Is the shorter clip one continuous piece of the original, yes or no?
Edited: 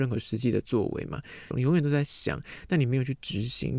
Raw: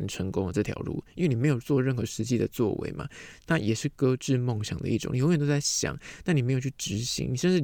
no